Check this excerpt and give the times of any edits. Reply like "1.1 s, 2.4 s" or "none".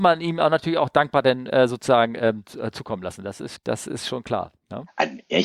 3.6 s